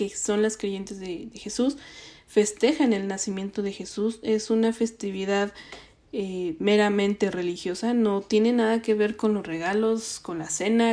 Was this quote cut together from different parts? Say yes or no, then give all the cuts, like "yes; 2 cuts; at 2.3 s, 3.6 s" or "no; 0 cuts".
no; 0 cuts